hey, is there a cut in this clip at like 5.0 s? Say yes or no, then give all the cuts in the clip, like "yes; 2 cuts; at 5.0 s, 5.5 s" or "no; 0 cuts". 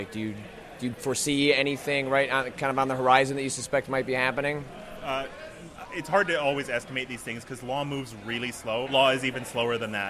no; 1 cut; at 8.9 s